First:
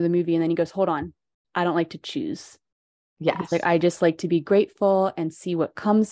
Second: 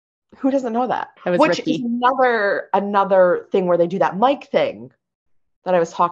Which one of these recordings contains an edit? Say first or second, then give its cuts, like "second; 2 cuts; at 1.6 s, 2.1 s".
second; 1 cut; at 1.2 s